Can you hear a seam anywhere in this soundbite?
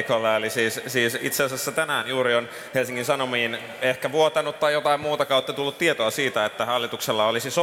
no; 0 cuts

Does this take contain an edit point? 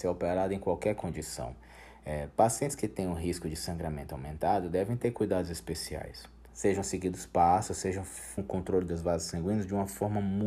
yes; 2 cuts; at 6.5 s, 8.4 s

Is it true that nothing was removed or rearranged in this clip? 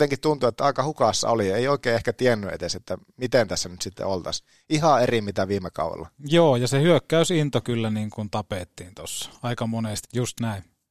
no; 1 cut; at 10.0 s

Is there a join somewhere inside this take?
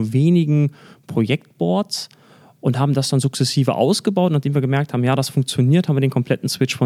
no; 0 cuts

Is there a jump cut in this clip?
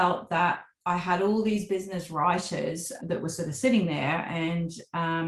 yes; 1 cut; at 3.0 s

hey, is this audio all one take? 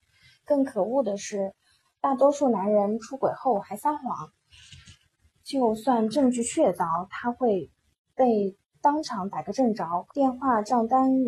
no; 1 cut; at 10.1 s

